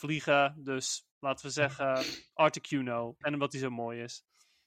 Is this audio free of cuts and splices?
no; 1 cut; at 3.2 s

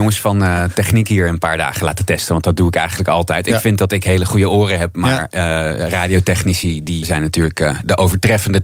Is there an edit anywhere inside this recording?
yes; 1 cut; at 7.0 s

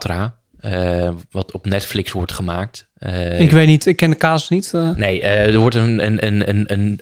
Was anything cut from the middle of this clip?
no; 0 cuts

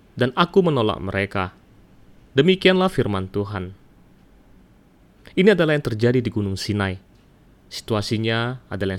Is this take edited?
no; 0 cuts

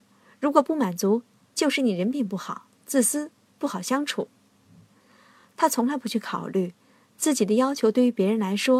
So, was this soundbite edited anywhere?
no; 0 cuts

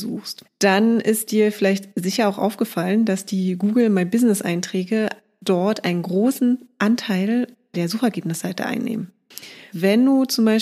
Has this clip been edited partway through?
yes; 1 cut; at 9.7 s

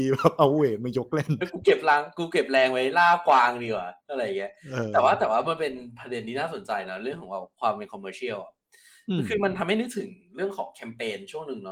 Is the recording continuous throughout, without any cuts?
no; 2 cuts; at 1.4 s, 4.0 s

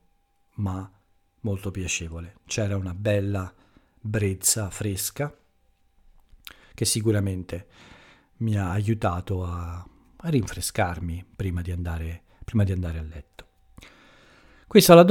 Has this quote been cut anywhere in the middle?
no; 0 cuts

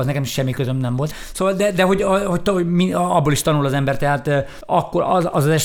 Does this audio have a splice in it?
no; 0 cuts

